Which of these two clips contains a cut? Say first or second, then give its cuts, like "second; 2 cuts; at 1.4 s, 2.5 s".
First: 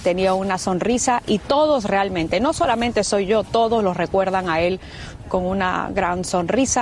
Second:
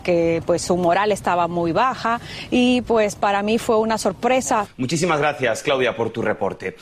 second; 1 cut; at 4.7 s